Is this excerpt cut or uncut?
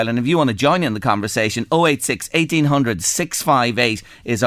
uncut